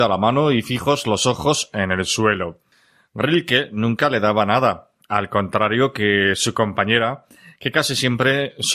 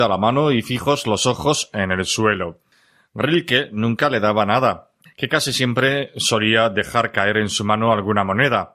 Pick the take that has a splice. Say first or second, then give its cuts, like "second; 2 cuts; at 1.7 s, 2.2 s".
second; 1 cut; at 5.1 s